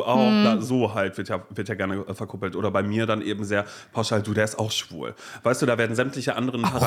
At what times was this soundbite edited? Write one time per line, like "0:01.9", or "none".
none